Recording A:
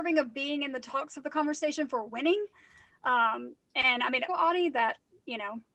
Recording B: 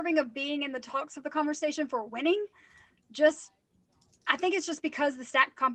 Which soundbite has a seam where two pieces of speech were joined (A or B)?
A